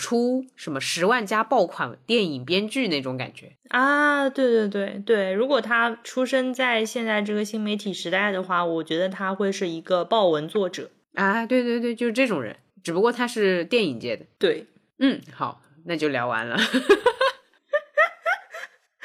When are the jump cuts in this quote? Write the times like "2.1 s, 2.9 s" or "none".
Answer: none